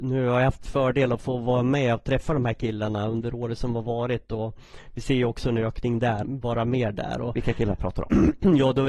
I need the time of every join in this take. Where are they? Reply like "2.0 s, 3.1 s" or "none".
6.2 s